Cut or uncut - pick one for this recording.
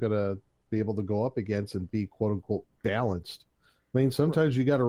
uncut